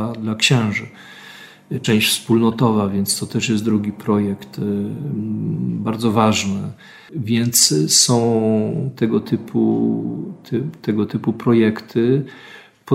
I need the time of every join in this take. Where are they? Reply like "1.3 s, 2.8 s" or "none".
none